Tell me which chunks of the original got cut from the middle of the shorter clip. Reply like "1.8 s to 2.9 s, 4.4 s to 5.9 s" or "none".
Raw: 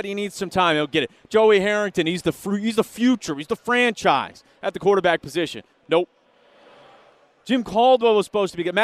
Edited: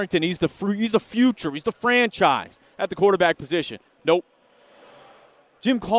none